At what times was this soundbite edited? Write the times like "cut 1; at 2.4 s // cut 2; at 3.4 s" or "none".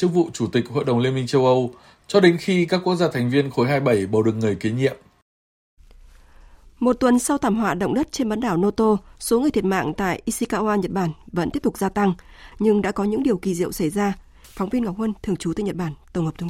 cut 1; at 12.5 s // cut 2; at 14.4 s